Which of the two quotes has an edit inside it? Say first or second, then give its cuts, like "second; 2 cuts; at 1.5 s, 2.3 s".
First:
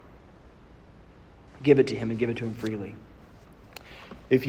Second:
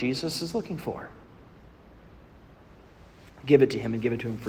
first; 1 cut; at 1.5 s